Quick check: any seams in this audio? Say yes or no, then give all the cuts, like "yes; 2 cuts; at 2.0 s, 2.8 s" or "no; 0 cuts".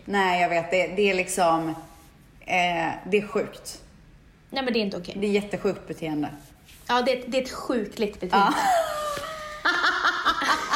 no; 0 cuts